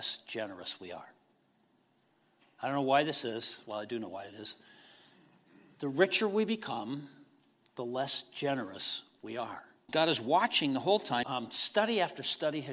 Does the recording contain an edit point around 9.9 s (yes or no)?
yes